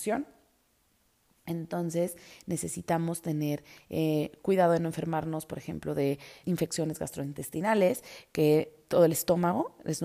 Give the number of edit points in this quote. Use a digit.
1